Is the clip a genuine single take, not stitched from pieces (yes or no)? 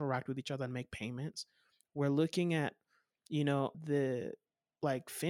no